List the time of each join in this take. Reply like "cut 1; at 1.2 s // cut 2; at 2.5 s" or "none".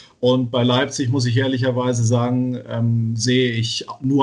none